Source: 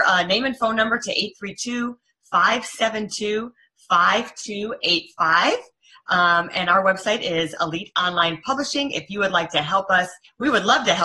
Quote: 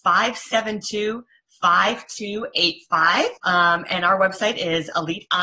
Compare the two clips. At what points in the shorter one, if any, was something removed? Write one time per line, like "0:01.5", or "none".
0:03.4